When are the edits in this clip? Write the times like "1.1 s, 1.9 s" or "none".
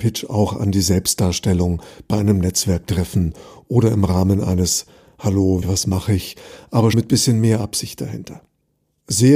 5.6 s, 6.9 s